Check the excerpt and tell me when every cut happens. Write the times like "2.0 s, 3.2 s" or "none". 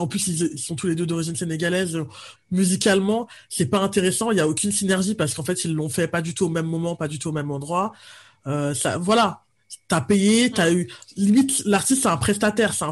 2.3 s